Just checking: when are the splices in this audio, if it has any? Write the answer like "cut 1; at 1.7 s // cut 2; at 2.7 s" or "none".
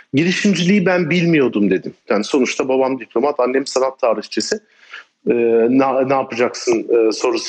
cut 1; at 2.1 s // cut 2; at 5.1 s